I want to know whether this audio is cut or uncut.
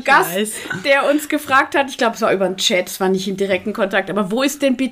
uncut